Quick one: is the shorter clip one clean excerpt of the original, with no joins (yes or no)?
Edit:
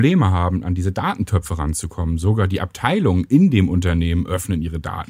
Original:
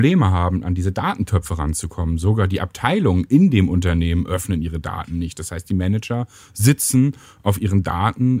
yes